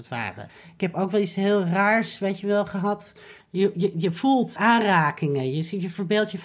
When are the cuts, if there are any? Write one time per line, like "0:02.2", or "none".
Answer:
0:03.4
0:04.6